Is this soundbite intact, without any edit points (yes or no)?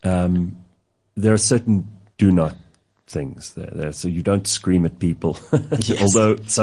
yes